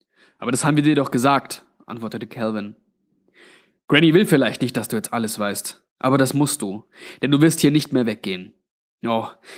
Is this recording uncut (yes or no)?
yes